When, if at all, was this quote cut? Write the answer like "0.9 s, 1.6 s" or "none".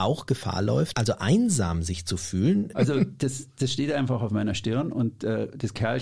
0.9 s, 2.7 s